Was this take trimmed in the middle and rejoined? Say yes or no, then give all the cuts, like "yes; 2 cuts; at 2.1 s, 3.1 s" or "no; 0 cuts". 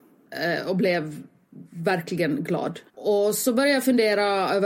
yes; 1 cut; at 2.9 s